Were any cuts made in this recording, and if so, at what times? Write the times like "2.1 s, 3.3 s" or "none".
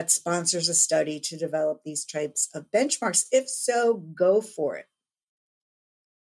none